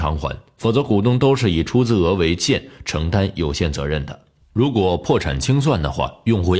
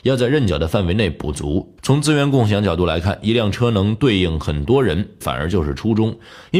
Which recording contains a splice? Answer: second; 2 cuts; at 1.8 s, 5.2 s

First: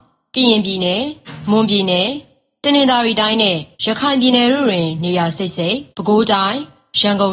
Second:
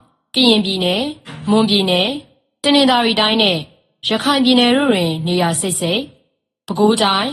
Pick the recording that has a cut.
first; 2 cuts; at 3.7 s, 5.9 s

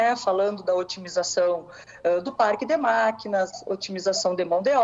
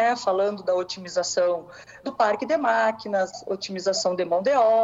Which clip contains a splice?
second; 1 cut; at 2.0 s

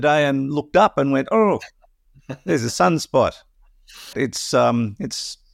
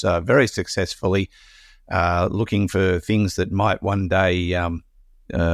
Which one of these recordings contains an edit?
first; 1 cut; at 4.1 s

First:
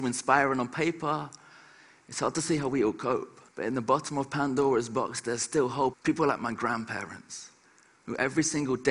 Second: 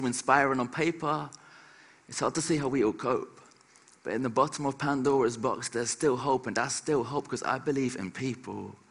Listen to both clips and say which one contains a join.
first; 2 cuts; at 3.5 s, 5.9 s

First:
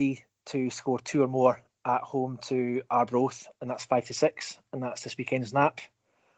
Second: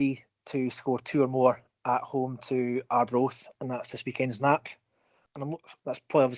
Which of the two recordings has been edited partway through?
second; 2 cuts; at 3.5 s, 5.2 s

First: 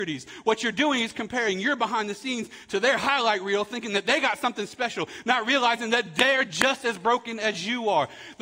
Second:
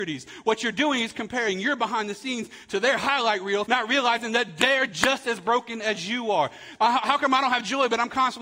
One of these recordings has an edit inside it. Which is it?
second; 2 cuts; at 3.7 s, 6.8 s

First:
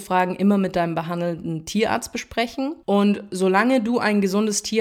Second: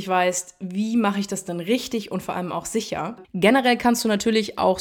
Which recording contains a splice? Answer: second; 1 cut; at 3.2 s

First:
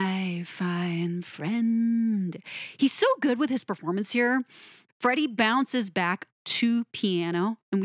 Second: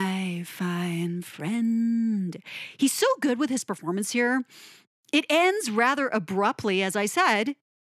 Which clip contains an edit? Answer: first; 1 cut; at 4.9 s

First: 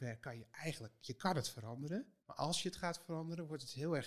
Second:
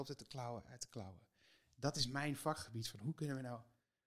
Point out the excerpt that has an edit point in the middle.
first; 1 cut; at 2.2 s

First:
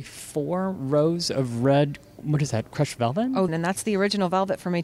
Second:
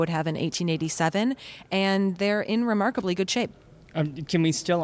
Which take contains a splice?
first; 1 cut; at 3.5 s

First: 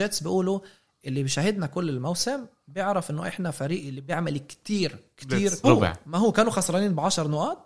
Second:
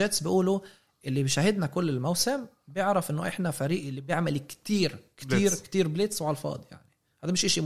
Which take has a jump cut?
first; 1 cut; at 5.6 s

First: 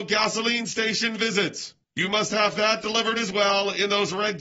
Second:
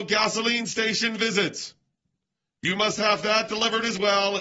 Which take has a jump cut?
first; 1 cut; at 1.8 s

